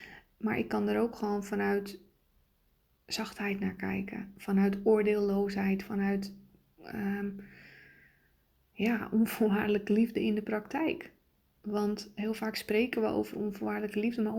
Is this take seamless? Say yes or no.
yes